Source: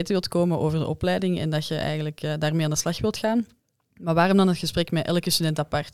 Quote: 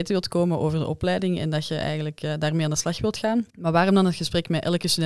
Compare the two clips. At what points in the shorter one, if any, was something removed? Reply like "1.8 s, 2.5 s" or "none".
3.5 s